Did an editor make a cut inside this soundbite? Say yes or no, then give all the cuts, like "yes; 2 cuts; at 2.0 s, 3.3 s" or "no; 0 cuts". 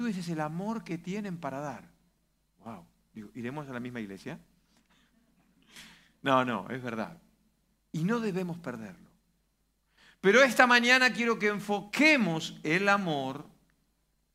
no; 0 cuts